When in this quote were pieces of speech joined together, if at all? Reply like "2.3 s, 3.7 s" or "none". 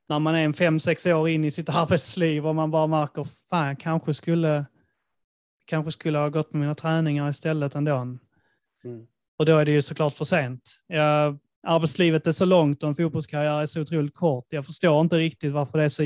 none